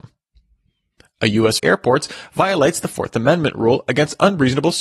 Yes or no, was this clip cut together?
yes